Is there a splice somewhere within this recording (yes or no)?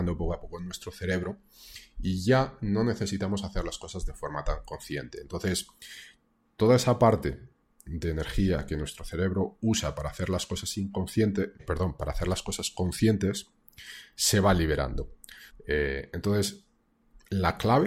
yes